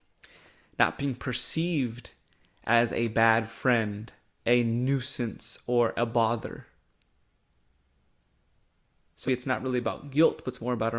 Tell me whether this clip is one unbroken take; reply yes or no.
no